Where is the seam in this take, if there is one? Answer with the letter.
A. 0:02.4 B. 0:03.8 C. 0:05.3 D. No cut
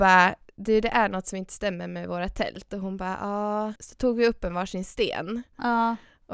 B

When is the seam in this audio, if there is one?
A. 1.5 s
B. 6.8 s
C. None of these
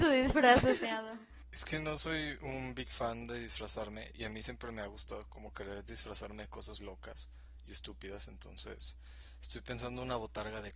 B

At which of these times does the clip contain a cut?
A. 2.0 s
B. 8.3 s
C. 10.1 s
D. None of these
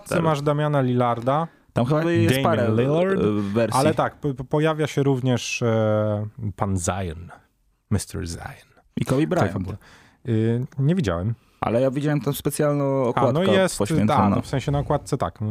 A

